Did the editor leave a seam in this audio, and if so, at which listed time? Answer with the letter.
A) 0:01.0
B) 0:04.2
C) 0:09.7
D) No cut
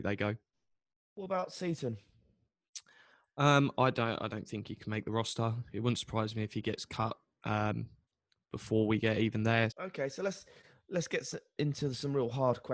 C